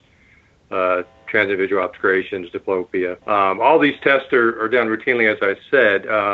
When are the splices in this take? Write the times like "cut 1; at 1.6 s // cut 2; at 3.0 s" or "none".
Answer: cut 1; at 3.2 s